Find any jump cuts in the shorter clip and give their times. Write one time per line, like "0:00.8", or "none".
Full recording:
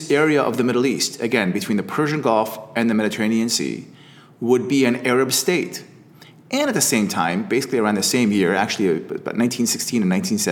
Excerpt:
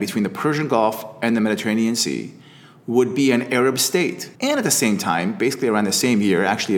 0:04.4